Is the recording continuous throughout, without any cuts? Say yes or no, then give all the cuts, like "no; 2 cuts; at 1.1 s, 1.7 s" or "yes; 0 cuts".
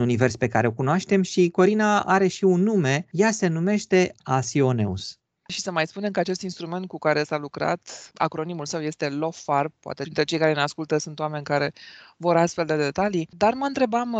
no; 1 cut; at 5.5 s